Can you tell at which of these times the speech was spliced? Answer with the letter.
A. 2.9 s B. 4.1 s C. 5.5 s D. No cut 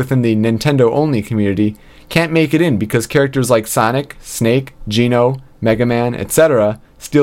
D